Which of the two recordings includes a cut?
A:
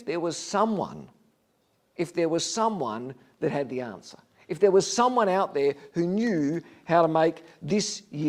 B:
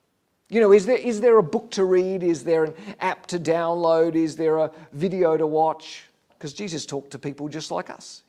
B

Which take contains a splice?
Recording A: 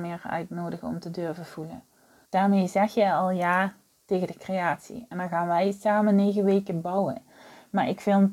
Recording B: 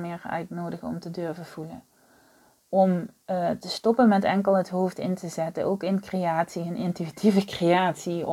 A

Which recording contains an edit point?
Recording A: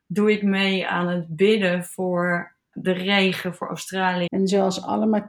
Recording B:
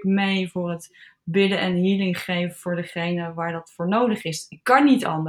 A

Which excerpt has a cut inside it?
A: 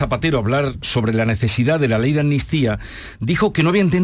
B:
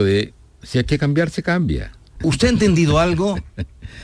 B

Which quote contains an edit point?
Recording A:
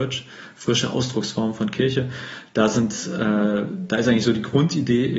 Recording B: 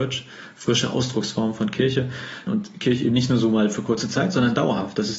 B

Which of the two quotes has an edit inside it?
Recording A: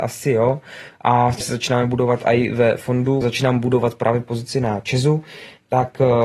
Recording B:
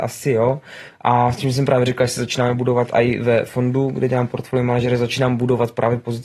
A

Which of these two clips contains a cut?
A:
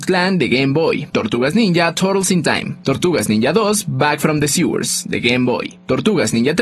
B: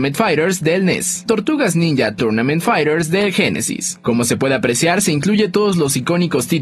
B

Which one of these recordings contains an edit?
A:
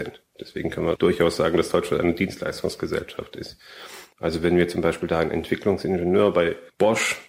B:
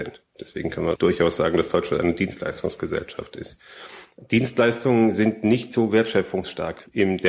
A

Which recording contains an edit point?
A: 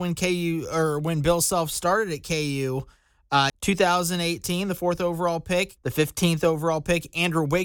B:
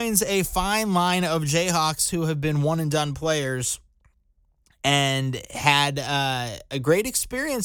A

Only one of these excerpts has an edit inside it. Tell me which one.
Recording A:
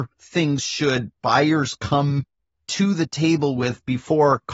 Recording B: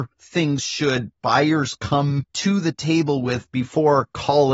B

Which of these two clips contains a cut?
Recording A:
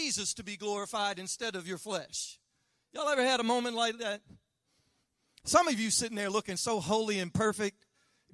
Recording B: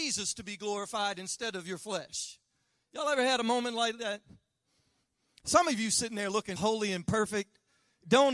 B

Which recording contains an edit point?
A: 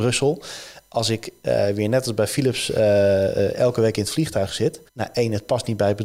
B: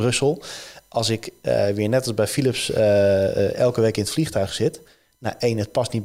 A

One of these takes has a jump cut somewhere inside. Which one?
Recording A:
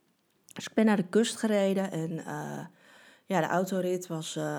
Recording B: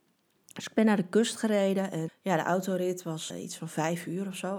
B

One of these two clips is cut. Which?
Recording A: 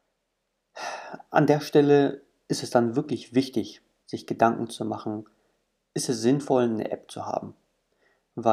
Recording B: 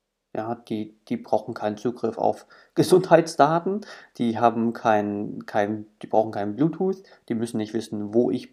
A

